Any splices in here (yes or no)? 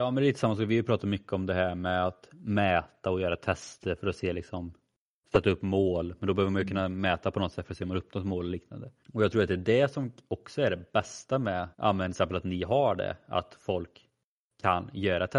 yes